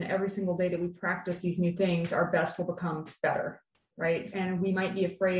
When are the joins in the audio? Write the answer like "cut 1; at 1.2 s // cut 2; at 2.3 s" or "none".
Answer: cut 1; at 4.3 s